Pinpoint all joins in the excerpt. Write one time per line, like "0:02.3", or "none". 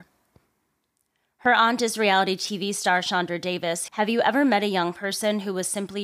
0:03.9